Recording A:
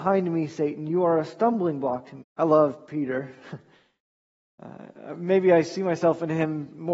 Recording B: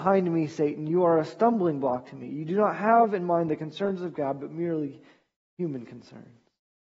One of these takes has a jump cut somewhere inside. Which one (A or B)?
A